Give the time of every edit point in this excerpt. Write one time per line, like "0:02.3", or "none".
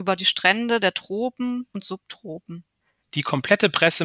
0:03.0